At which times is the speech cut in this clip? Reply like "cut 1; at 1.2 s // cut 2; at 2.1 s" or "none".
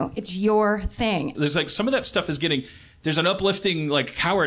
cut 1; at 1.3 s